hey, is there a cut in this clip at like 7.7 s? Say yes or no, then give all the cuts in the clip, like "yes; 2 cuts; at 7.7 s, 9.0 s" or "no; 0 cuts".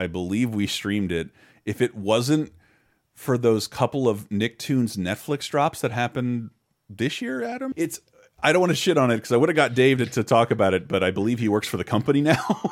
yes; 1 cut; at 7.7 s